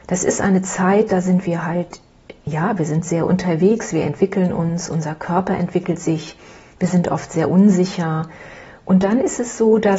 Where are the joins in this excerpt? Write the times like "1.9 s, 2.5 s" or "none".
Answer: none